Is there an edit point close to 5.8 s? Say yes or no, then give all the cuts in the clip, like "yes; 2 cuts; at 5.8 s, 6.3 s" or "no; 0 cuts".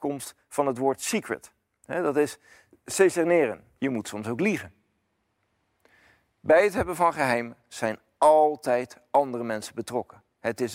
no; 1 cut; at 3.8 s